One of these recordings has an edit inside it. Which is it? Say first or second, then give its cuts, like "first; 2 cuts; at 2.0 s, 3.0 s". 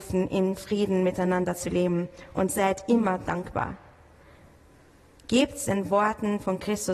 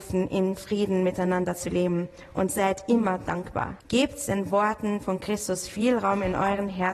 second; 1 cut; at 3.8 s